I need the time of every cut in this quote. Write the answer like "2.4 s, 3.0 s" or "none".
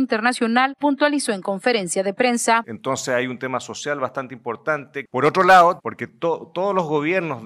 5.8 s

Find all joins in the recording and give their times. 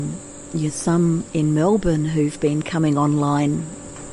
none

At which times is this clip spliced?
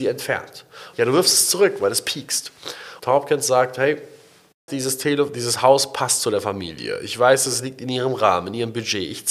0.9 s, 3.0 s, 4.7 s

